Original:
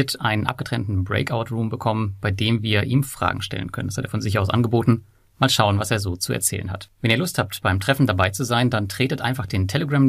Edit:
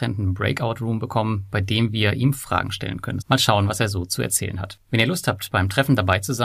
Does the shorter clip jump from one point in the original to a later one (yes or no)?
yes